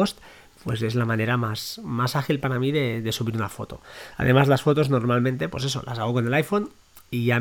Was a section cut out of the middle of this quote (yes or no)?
no